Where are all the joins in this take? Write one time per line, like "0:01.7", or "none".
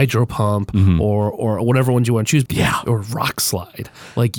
0:02.5